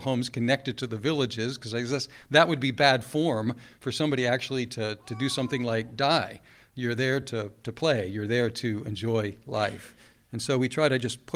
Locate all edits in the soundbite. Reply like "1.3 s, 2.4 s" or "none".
none